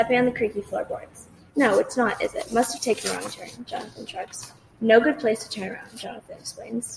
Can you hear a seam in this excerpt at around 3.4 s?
no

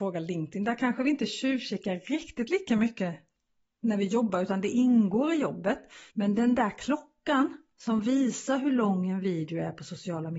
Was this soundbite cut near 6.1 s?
yes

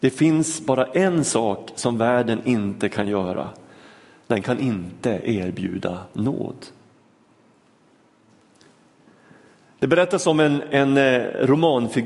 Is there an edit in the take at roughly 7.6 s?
no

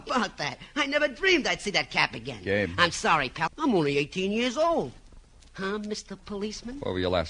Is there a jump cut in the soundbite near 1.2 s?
no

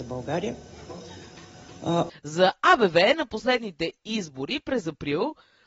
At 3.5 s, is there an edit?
no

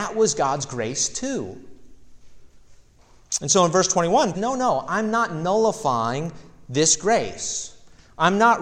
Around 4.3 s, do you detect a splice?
yes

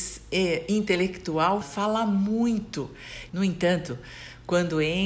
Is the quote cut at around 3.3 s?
yes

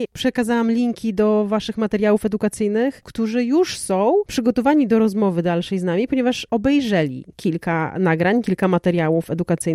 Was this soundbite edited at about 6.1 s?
no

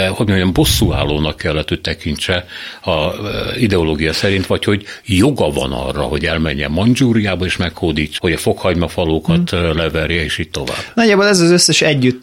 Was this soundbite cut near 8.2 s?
yes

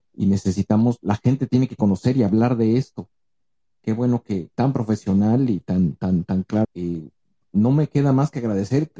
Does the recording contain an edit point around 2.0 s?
no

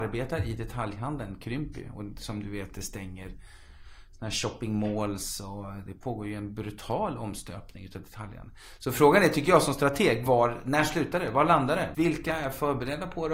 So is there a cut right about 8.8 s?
no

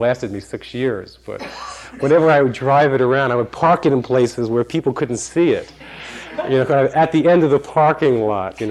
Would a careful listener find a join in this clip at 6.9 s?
no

